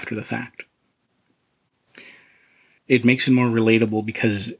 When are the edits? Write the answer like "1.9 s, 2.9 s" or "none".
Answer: 2.8 s